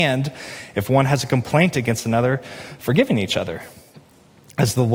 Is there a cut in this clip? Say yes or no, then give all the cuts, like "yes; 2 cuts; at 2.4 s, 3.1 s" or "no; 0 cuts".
no; 0 cuts